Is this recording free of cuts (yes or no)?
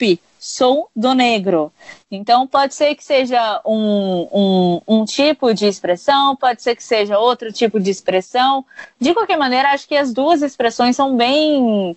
yes